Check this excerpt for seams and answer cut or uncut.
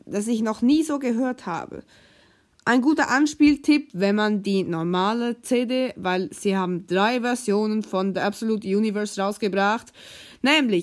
uncut